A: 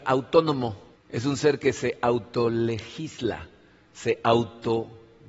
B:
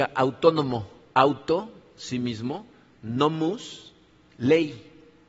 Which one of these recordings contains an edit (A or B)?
A